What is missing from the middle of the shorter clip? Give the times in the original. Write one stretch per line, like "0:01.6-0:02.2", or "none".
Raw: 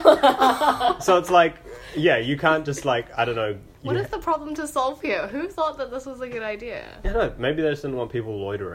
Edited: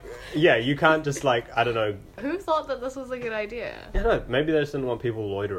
0:03.8-0:05.3

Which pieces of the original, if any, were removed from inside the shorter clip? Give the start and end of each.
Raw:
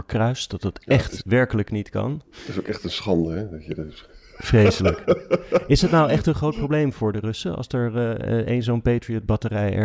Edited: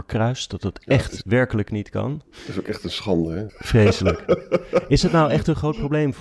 0:03.5-0:04.3

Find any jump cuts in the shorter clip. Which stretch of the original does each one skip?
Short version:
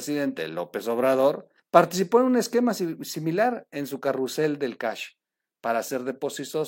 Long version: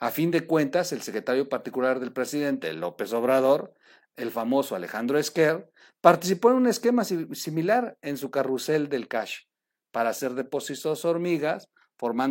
0:03.8-0:05.9

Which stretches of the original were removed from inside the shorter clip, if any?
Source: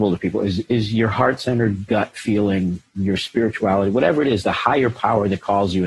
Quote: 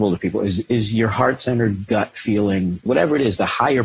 0:02.9-0:03.9

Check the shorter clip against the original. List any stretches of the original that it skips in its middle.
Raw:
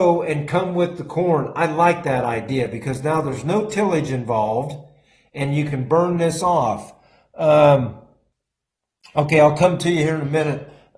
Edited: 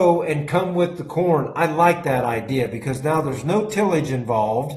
none

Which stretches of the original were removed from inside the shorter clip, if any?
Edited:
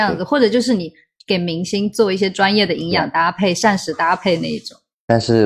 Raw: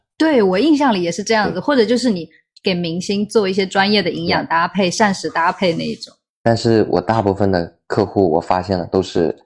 none

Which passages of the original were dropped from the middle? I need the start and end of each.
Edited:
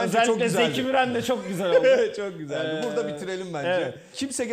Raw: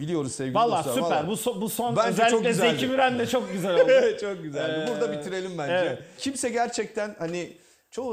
none

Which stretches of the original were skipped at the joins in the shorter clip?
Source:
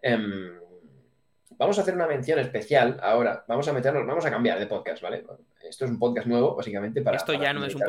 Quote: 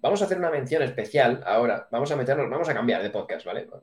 none

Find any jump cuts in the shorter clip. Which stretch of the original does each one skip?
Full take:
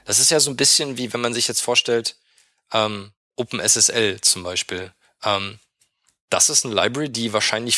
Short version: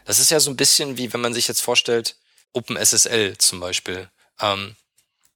0:02.4-0:03.2

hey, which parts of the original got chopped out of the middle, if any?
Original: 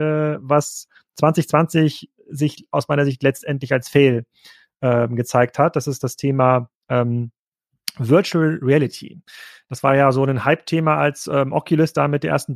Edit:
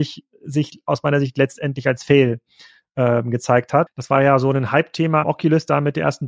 0:05.7-0:09.6
0:11.0-0:11.5

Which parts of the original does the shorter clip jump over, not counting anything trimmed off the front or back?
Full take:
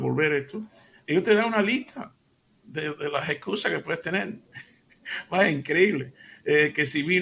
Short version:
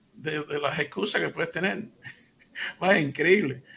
none

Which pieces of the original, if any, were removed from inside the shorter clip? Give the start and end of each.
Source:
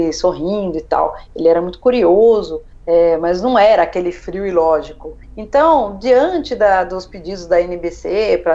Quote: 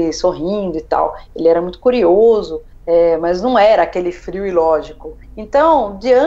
none

